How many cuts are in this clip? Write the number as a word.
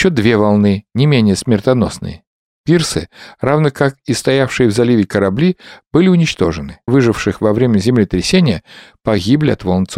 one